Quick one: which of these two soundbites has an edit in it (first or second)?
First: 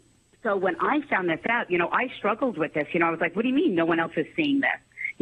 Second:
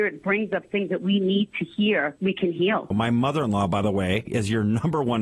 second